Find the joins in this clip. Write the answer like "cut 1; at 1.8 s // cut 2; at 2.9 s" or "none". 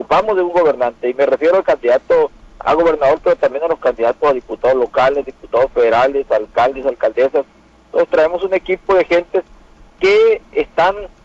none